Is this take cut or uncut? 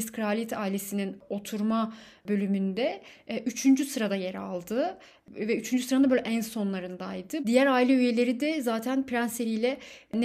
cut